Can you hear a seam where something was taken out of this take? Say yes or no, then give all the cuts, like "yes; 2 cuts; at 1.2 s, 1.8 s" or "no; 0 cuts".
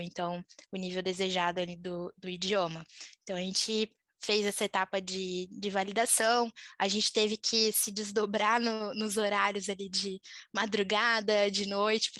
no; 0 cuts